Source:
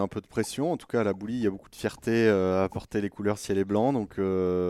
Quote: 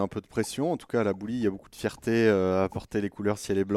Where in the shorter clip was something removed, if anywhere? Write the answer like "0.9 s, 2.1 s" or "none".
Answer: none